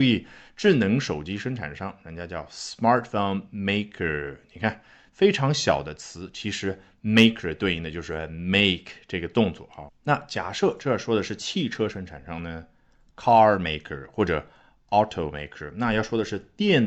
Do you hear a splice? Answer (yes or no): yes